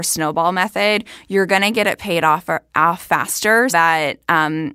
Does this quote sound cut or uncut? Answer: cut